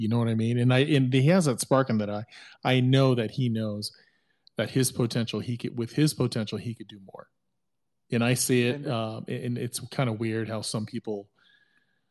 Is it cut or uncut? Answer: uncut